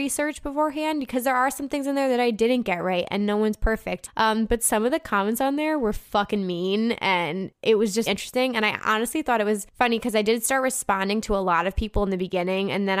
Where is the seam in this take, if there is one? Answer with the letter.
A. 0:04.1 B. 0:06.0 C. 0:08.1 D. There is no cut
C